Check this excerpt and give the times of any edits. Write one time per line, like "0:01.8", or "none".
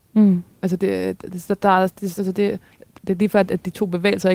none